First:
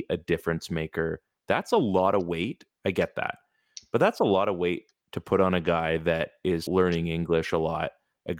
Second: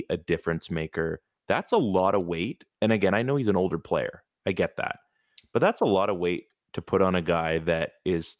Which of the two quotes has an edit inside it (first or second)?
first